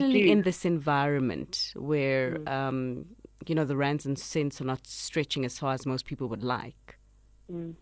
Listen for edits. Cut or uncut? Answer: uncut